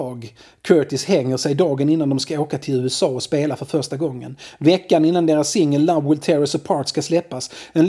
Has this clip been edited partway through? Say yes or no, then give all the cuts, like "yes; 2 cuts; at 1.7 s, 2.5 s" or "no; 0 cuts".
no; 0 cuts